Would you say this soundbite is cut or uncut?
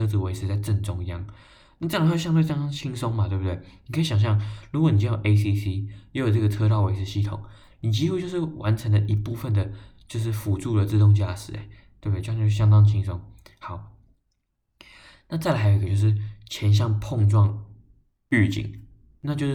uncut